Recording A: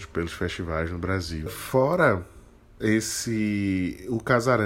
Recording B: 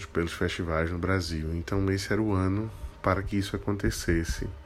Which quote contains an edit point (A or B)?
A